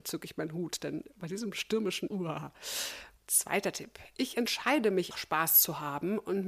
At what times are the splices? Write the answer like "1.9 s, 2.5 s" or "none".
2.1 s, 3.2 s, 5.1 s